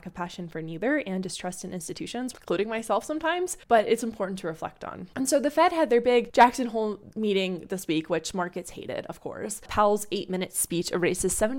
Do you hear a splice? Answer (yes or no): yes